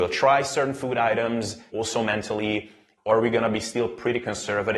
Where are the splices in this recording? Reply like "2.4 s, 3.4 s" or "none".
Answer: 1.7 s, 3.0 s